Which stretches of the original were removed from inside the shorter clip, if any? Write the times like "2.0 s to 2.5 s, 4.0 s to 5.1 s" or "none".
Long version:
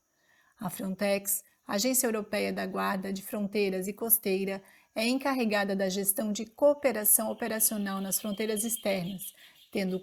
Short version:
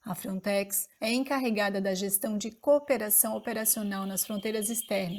1.5 s to 4.9 s